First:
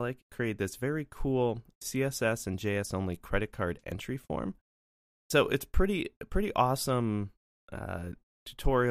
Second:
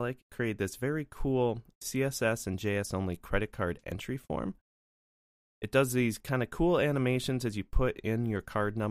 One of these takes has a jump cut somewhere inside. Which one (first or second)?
first